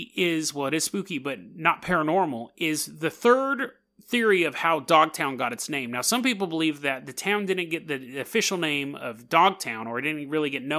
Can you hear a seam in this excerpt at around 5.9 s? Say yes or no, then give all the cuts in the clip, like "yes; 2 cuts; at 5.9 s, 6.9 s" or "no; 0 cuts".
no; 0 cuts